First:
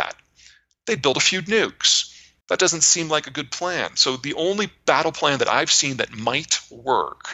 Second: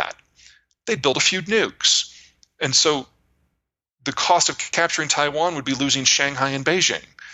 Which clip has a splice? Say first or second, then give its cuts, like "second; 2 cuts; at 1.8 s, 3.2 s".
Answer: first; 1 cut; at 2.4 s